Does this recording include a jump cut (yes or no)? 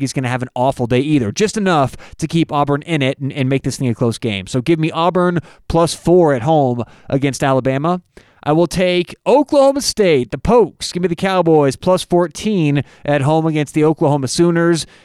no